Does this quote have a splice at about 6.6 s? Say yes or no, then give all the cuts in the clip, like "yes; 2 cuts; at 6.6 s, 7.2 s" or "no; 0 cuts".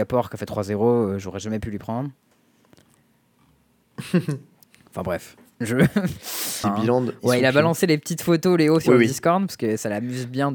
yes; 1 cut; at 6.6 s